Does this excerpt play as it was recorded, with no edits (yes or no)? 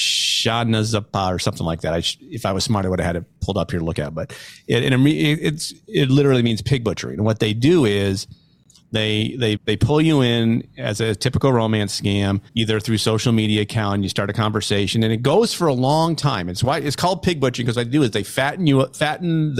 no